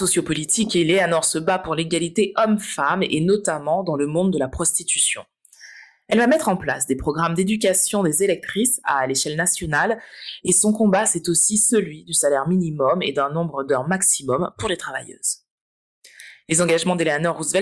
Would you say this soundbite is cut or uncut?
uncut